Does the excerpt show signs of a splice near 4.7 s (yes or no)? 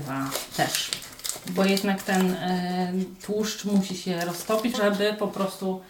yes